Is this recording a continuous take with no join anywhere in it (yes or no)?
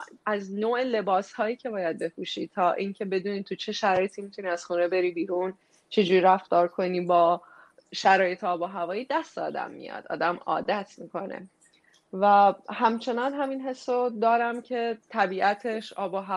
yes